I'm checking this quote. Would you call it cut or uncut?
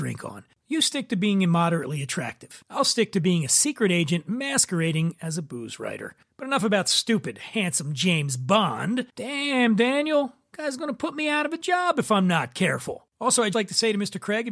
cut